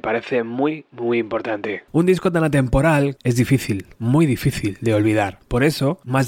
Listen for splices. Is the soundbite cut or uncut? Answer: cut